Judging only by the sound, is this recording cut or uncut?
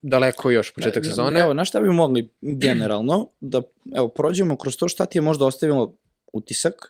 uncut